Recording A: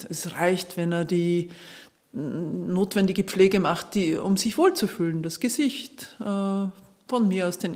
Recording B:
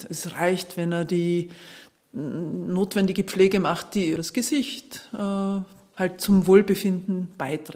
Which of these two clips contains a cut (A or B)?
B